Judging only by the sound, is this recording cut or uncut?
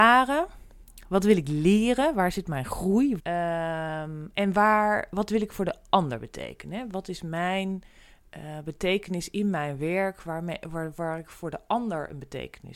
cut